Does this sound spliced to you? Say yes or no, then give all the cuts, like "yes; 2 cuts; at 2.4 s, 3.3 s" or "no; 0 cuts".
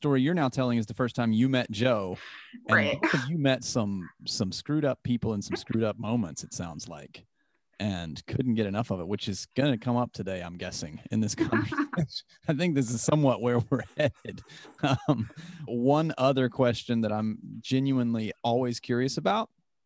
yes; 1 cut; at 15.7 s